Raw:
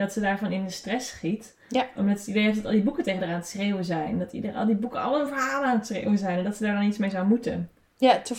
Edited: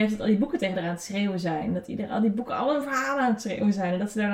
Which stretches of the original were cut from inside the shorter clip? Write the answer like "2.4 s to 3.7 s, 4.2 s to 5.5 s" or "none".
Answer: none